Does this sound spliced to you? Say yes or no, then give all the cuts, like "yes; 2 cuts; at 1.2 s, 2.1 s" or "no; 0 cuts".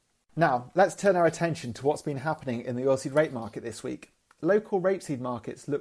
no; 0 cuts